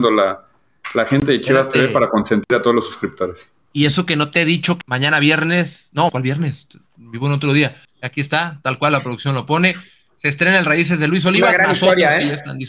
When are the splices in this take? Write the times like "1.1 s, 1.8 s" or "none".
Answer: 4.8 s, 6.1 s, 7.8 s